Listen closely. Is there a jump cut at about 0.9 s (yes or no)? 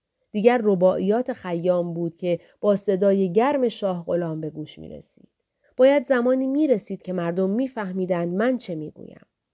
no